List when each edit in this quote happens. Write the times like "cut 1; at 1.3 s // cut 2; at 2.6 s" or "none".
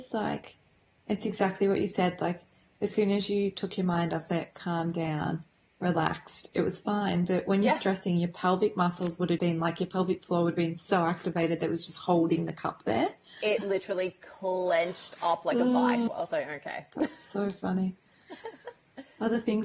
cut 1; at 9.4 s // cut 2; at 16.1 s